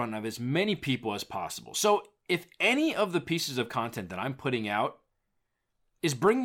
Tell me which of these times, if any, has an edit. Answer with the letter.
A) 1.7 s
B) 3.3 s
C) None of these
C